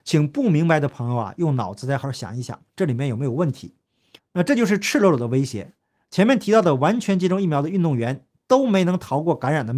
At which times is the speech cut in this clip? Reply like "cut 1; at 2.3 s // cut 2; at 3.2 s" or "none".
cut 1; at 2.0 s // cut 2; at 4.2 s